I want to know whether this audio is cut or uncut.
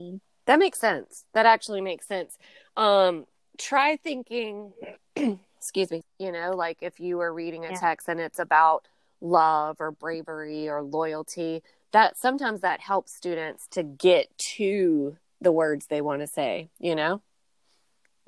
cut